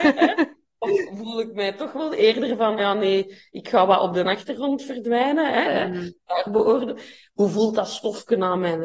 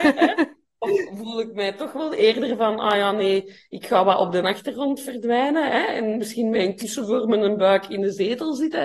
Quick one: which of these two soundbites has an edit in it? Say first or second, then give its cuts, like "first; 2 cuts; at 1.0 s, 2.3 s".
first; 2 cuts; at 2.8 s, 5.6 s